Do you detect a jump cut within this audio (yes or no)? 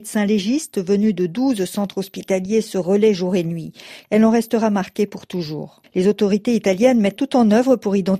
yes